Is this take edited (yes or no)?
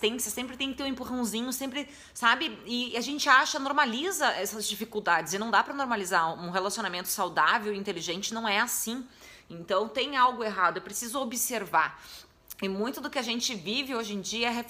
no